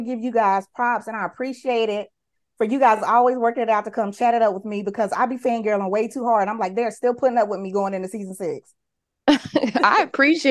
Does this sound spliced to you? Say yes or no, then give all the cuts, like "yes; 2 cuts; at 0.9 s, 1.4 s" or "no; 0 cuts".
no; 0 cuts